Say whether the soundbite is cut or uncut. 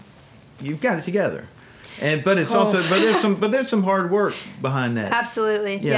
uncut